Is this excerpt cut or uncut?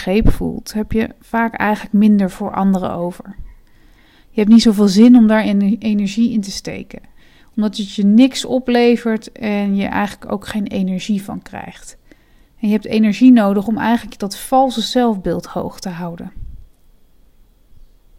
uncut